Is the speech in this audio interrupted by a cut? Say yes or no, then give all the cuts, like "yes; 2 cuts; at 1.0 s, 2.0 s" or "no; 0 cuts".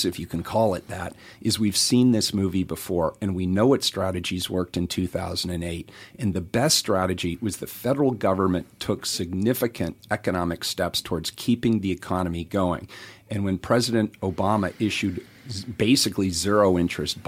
no; 0 cuts